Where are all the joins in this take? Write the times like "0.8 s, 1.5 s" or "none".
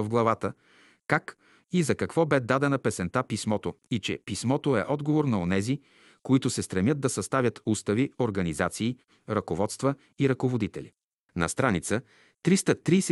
none

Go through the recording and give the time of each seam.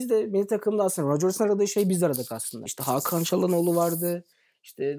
2.7 s

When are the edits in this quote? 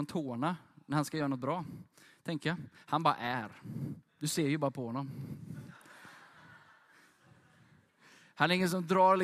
4.1 s

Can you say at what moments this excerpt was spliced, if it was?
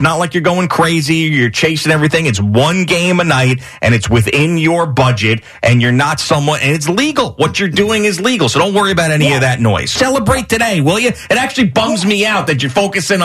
10.0 s

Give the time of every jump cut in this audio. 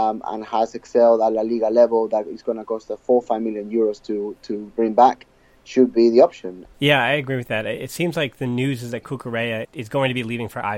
6.7 s, 9.6 s

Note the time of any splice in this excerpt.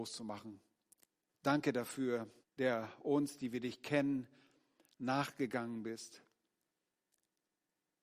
1.3 s, 2.4 s

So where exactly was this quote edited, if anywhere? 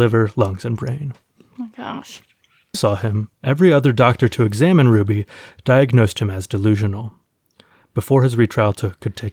2.7 s

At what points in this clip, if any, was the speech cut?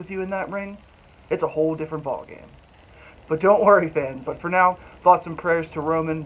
3.1 s, 4.2 s

